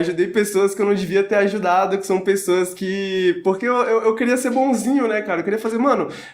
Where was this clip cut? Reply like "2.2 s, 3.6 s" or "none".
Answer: none